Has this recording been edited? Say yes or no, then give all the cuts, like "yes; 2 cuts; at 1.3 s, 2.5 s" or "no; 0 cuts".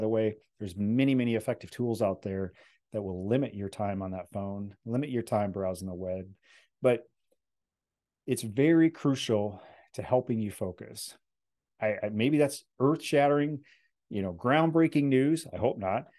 yes; 1 cut; at 11.7 s